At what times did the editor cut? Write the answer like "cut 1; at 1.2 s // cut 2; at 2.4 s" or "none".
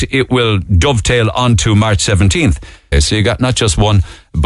cut 1; at 2.9 s